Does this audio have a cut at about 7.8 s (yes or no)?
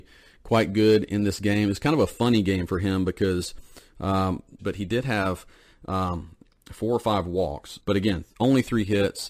yes